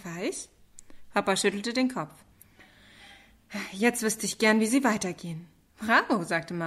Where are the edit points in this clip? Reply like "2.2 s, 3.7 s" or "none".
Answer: 5.7 s